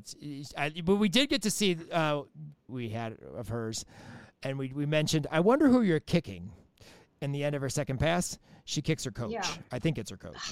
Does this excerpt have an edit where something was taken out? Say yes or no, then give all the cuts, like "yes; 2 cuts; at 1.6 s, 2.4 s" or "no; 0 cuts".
yes; 1 cut; at 2.7 s